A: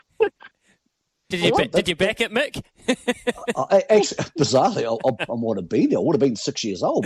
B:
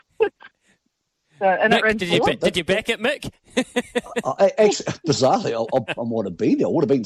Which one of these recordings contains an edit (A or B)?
A